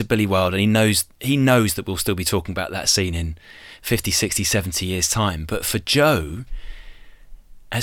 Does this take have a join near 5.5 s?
no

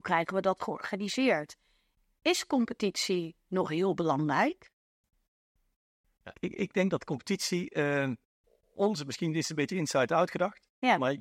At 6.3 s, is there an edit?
yes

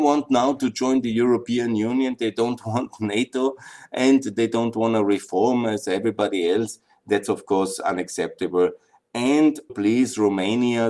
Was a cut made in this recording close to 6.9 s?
no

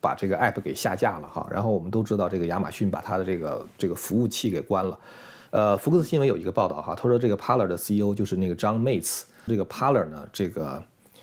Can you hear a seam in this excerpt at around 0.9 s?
no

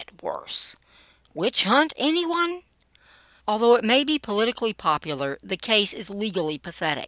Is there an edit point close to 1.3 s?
no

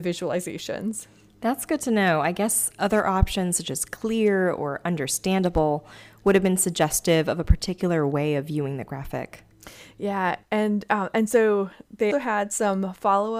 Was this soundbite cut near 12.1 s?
yes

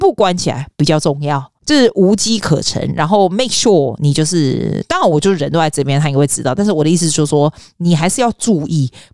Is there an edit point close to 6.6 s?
no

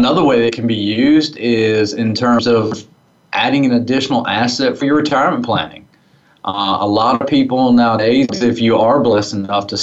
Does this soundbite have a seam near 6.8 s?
no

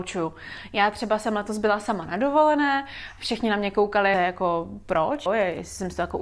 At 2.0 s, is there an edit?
no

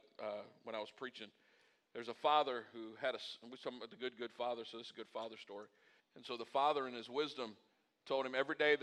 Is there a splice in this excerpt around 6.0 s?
yes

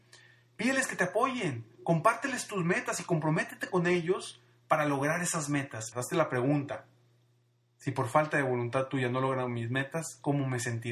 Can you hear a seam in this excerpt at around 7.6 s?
no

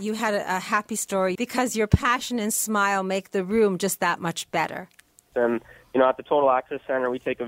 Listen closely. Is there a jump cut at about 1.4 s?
yes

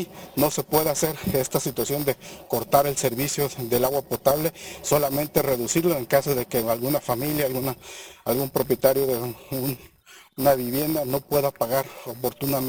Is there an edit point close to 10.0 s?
no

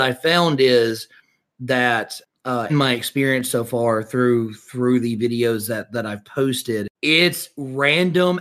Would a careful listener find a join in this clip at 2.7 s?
yes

